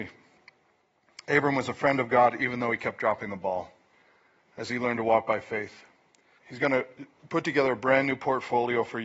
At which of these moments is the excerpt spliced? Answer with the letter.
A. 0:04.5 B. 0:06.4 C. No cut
B